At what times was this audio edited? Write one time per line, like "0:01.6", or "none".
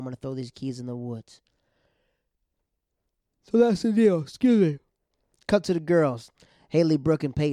none